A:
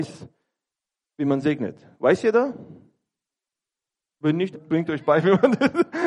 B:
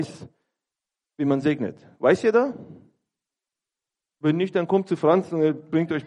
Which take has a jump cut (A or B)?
A